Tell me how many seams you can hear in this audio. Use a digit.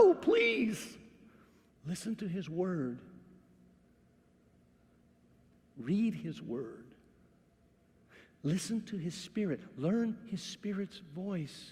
1